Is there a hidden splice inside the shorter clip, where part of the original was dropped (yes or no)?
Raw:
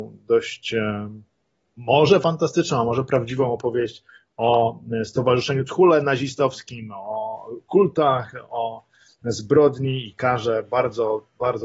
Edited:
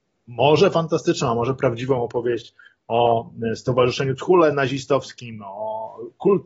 no